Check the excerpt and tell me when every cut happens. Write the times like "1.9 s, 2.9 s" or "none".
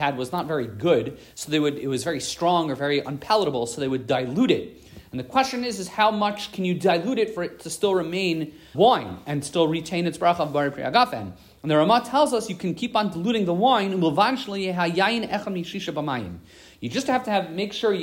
8.7 s